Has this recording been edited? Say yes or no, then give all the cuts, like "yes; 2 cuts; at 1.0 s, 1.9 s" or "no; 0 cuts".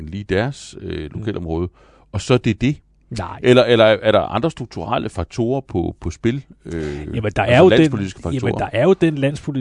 no; 0 cuts